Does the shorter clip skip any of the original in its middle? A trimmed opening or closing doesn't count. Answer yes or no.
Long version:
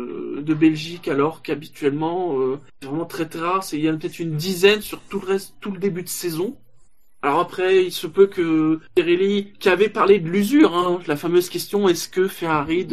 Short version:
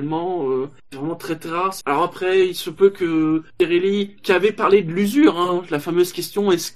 yes